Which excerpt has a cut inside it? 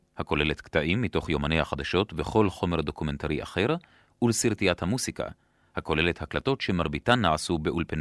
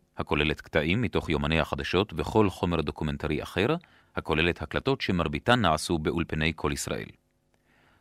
second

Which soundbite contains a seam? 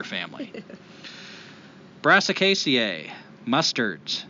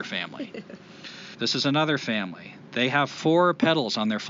second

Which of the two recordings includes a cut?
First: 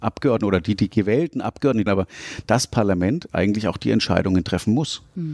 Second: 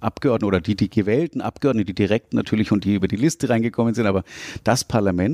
first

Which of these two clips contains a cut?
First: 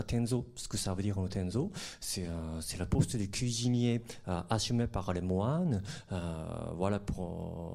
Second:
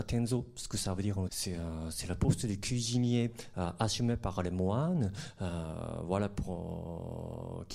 second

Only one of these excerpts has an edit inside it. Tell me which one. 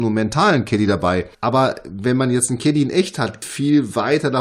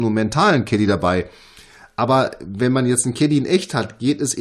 first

